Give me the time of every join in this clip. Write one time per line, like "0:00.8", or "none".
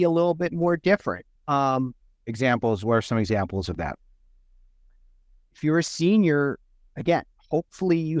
0:01.4